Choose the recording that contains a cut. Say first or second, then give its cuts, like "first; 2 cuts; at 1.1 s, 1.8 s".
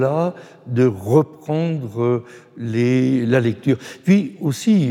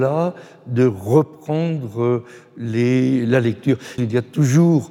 second; 1 cut; at 4.0 s